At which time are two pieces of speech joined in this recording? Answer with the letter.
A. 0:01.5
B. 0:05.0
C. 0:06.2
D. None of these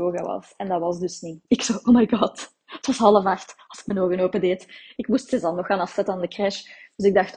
A